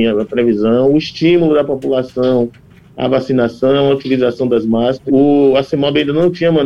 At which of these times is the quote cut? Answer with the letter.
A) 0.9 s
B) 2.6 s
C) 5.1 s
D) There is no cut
C